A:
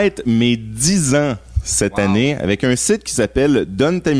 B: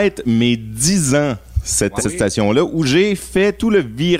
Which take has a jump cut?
B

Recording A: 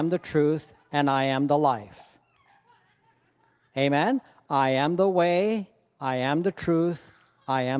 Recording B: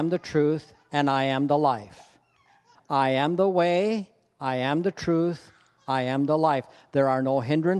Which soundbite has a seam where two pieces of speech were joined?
B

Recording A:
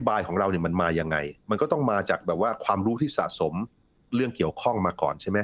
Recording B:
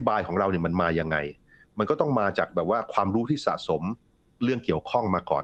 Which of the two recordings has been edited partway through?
A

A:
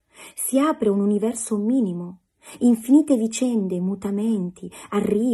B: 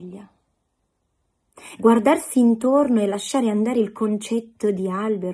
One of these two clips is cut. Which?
B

